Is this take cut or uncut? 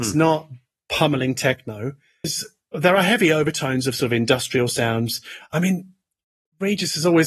cut